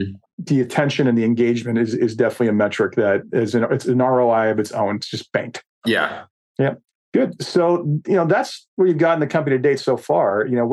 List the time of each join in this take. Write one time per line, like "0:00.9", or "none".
none